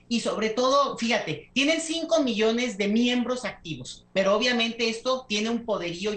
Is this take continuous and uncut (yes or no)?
yes